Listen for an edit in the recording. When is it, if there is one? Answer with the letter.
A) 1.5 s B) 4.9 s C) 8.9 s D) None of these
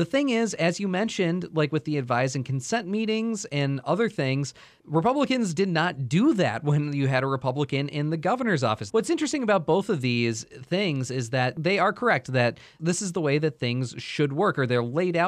C